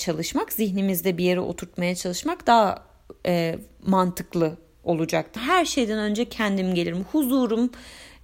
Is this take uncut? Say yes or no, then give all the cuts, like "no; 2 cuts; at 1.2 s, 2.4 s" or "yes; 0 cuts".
no; 1 cut; at 5.4 s